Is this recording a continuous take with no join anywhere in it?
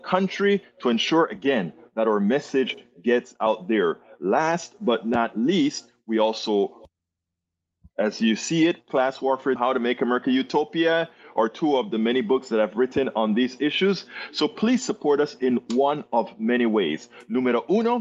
no; 1 cut; at 9.6 s

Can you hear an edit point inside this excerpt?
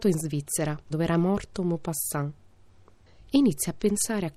yes; 1 cut; at 0.9 s

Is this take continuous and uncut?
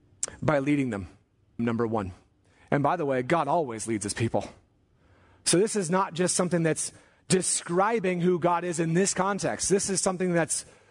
no; 1 cut; at 1.6 s

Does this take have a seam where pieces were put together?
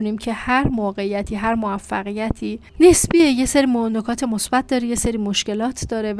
yes; 1 cut; at 2.7 s

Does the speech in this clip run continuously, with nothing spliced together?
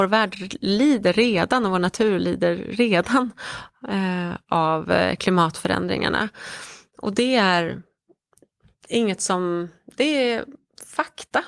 yes; 0 cuts

